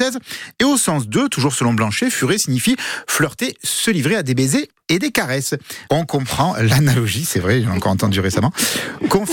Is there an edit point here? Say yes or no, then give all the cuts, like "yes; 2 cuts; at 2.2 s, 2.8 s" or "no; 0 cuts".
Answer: yes; 1 cut; at 5.8 s